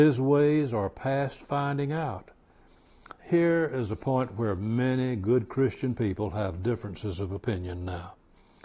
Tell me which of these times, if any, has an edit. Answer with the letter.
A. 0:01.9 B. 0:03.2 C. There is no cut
B